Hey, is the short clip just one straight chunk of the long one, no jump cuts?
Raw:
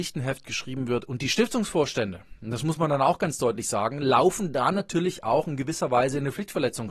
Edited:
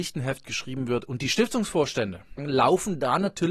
no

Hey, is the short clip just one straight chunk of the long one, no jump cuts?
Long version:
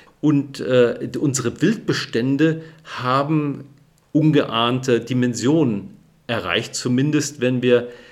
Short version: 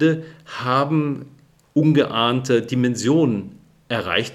yes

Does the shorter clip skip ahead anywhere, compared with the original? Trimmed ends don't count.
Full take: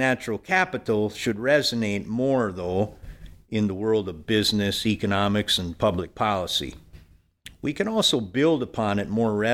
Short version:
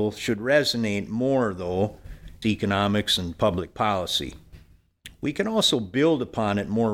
yes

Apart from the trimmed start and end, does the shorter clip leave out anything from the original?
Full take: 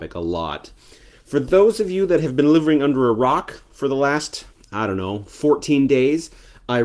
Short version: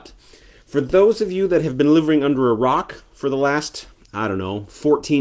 no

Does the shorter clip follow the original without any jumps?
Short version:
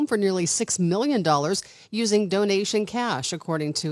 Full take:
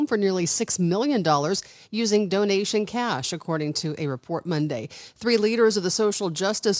yes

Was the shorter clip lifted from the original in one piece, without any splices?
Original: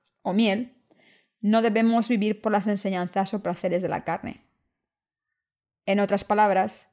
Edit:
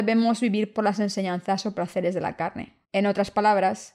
no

